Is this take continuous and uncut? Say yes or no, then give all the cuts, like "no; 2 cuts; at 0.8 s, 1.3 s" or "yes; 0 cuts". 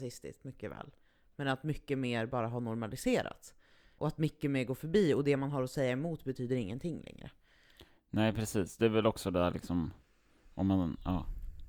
yes; 0 cuts